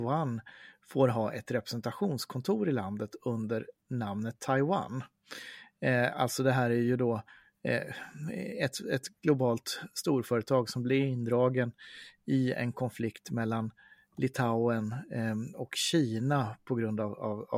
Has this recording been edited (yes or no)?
no